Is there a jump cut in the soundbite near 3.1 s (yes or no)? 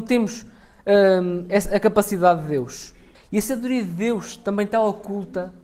yes